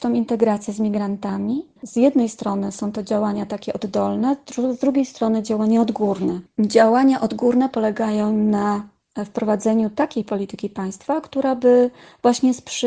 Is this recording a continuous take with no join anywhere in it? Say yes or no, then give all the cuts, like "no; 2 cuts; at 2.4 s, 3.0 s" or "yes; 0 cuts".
no; 1 cut; at 1.8 s